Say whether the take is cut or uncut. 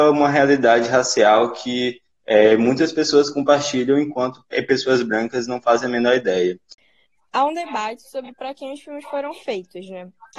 uncut